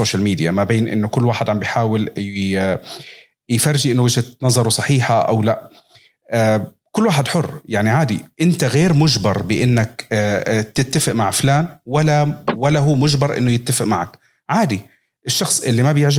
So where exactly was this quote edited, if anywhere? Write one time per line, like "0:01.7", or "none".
none